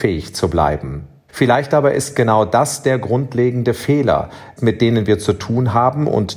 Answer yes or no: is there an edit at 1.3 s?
yes